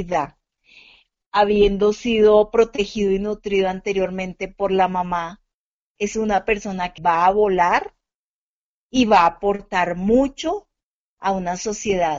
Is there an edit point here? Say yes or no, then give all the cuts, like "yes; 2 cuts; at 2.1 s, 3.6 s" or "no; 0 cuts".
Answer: yes; 1 cut; at 7.0 s